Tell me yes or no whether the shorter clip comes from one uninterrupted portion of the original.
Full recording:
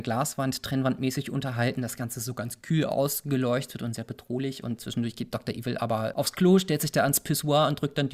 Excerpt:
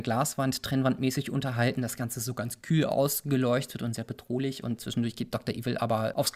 yes